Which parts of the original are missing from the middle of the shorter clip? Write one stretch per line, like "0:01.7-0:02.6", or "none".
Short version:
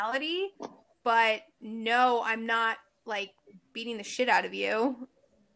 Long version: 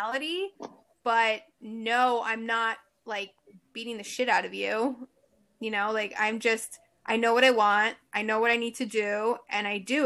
none